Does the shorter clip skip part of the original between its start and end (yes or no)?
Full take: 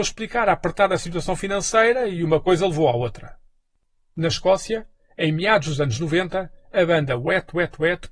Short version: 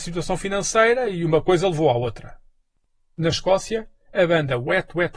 yes